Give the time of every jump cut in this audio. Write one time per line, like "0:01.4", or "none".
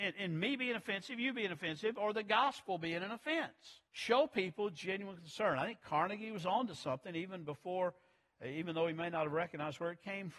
0:03.9